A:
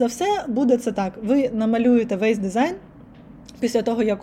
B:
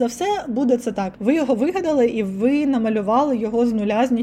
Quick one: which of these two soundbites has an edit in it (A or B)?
B